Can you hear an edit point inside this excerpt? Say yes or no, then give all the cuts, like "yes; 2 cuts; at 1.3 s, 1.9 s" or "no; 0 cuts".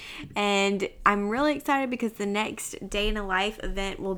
no; 0 cuts